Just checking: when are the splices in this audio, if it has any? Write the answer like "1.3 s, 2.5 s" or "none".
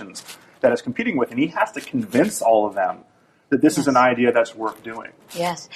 none